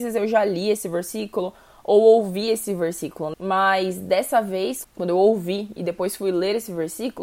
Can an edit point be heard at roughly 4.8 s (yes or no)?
yes